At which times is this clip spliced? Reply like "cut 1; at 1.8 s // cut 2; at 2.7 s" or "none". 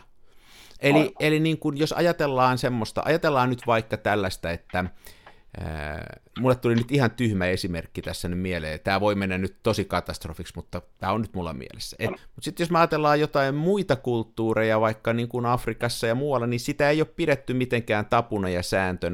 cut 1; at 6.3 s // cut 2; at 12.2 s